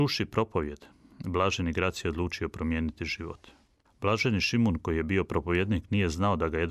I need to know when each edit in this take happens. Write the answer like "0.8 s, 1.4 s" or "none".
none